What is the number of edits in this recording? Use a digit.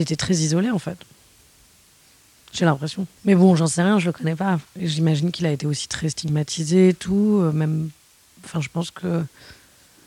2